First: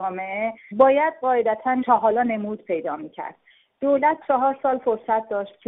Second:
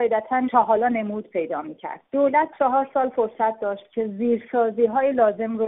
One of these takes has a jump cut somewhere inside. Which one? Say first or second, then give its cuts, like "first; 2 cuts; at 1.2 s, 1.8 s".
second; 1 cut; at 2.1 s